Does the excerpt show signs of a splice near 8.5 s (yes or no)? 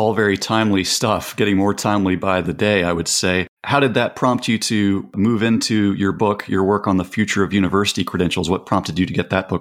no